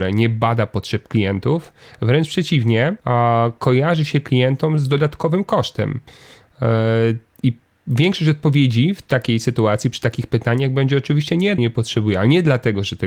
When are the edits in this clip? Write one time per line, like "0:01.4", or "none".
0:03.0
0:11.6